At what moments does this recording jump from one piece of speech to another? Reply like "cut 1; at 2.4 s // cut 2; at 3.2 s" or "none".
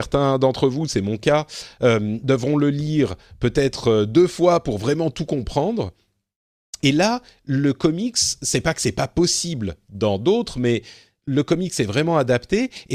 cut 1; at 6.8 s